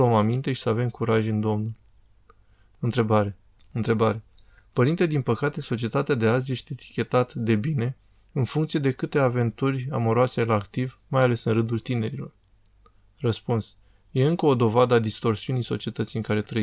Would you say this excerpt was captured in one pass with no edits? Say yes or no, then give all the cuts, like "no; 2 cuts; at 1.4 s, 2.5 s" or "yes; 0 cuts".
no; 1 cut; at 3.6 s